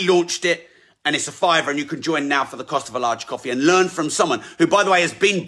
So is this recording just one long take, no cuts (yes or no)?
yes